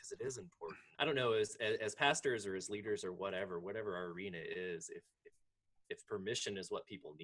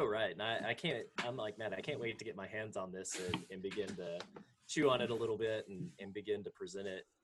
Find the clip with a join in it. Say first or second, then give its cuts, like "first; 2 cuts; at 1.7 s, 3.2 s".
first; 1 cut; at 0.9 s